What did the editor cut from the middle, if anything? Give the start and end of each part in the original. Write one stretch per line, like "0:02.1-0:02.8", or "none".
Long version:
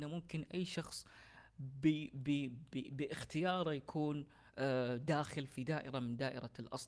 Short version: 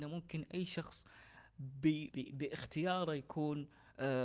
0:02.1-0:02.7